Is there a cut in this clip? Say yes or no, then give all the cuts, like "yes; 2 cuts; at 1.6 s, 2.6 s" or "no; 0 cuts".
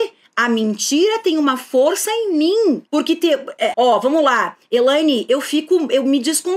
yes; 1 cut; at 3.7 s